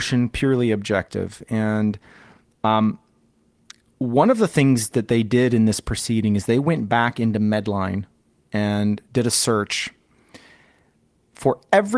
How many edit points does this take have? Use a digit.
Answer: 0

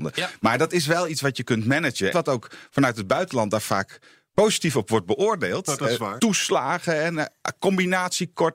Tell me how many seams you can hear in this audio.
2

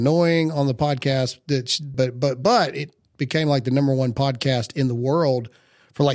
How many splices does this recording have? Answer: 1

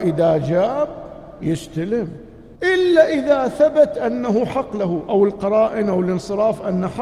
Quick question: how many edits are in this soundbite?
1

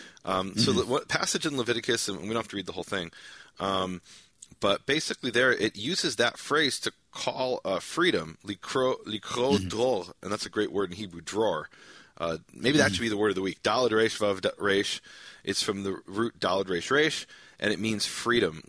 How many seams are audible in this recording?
0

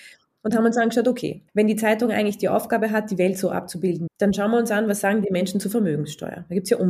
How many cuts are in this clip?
2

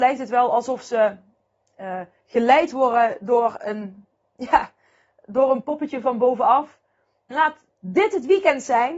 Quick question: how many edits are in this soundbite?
1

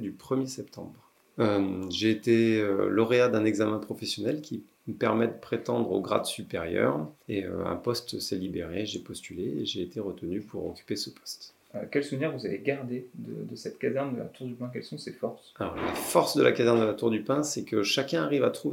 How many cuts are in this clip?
0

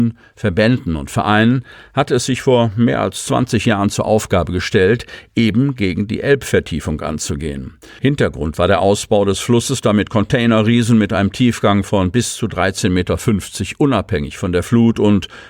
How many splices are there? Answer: 0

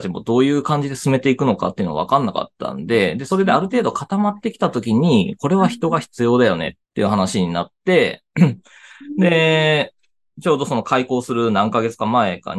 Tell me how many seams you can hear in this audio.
1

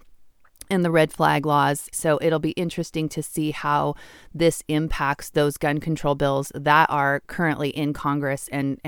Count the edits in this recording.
1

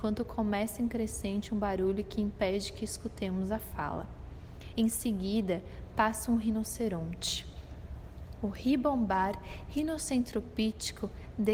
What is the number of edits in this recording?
0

